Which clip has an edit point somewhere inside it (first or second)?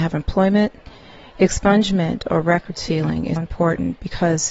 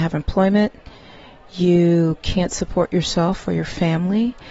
first